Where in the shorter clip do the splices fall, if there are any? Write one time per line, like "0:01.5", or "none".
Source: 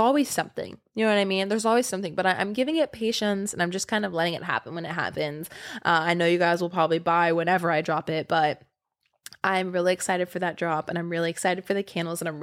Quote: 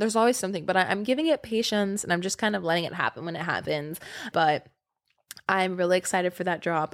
0:04.3